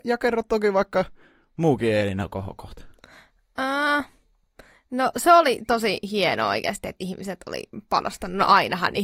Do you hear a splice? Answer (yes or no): no